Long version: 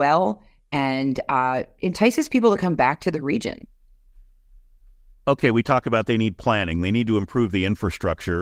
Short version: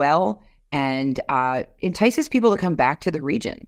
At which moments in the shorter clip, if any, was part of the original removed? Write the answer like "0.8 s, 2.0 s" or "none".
none